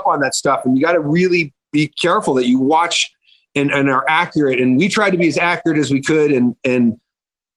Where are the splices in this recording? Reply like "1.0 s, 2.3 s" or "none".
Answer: none